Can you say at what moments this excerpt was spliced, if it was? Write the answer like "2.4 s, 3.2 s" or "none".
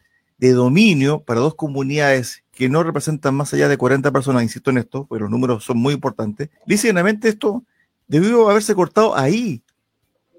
6.6 s